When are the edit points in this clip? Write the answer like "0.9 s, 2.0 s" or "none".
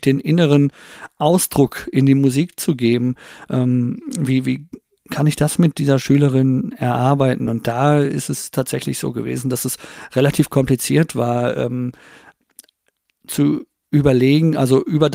none